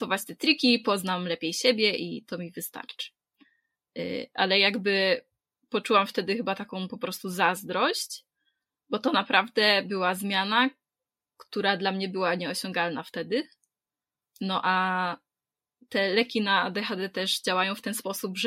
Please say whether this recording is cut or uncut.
uncut